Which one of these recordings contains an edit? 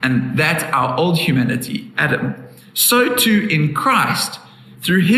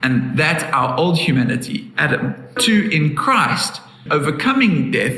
second; 2 cuts; at 2.6 s, 4.1 s

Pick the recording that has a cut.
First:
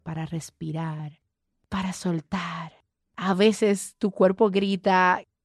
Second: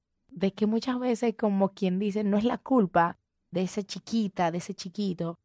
second; 1 cut; at 3.5 s

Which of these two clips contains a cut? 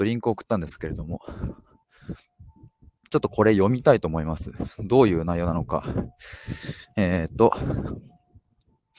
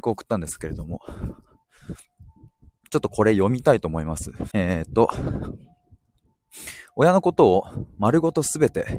second; 1 cut; at 4.5 s

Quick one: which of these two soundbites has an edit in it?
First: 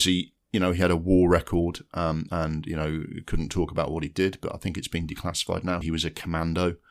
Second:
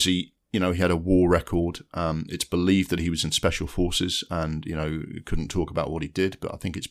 first; 2 cuts; at 2.3 s, 5.8 s

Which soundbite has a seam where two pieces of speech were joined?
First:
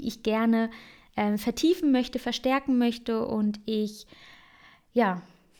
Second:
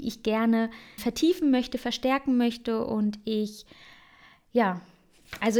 second; 1 cut; at 1.0 s

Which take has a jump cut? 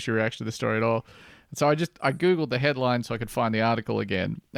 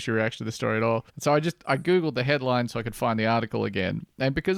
second; 1 cut; at 1.1 s

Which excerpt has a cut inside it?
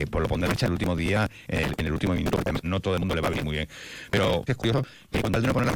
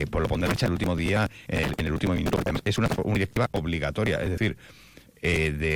first; 2 cuts; at 2.6 s, 4.5 s

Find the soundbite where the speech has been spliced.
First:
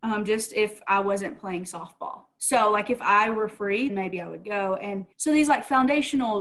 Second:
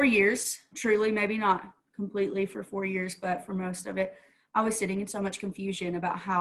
first; 2 cuts; at 3.9 s, 5.1 s

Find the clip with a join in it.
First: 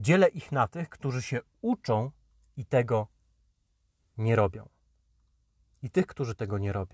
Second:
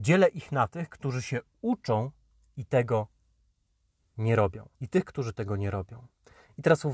second; 1 cut; at 4.7 s

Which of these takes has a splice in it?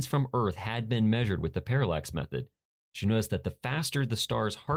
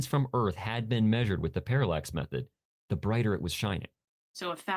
second; 1 cut; at 2.8 s

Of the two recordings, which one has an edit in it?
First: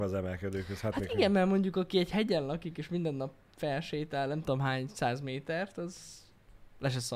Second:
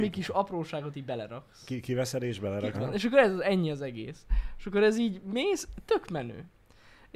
second; 1 cut; at 2.7 s

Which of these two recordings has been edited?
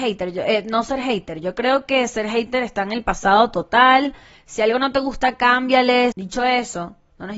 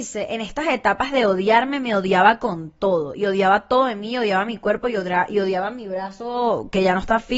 first; 1 cut; at 6.1 s

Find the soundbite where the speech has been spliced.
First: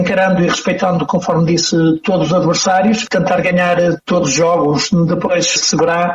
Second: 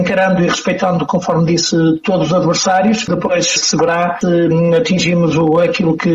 second; 1 cut; at 3.1 s

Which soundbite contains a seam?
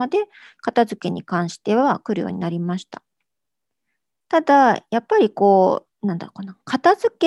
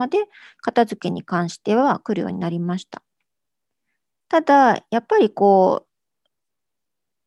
first; 1 cut; at 5.9 s

